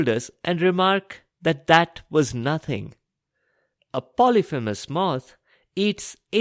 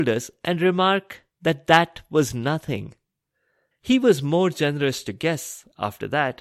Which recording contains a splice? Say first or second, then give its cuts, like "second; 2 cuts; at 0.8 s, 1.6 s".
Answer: second; 1 cut; at 3.7 s